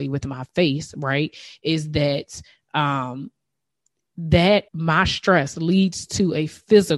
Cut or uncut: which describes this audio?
cut